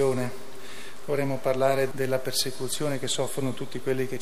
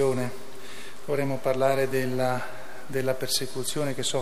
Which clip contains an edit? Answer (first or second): first